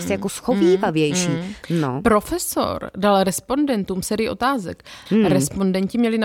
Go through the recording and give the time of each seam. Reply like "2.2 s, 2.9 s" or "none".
1.6 s, 5.1 s